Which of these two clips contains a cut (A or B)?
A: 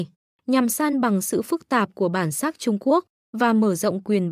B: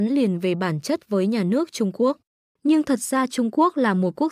B